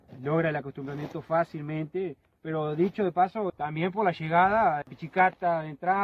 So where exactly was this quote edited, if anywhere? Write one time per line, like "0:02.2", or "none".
0:03.5
0:04.8